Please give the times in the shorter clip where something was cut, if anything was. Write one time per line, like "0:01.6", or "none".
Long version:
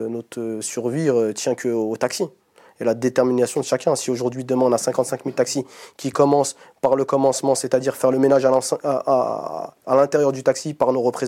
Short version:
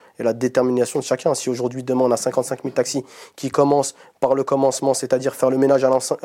none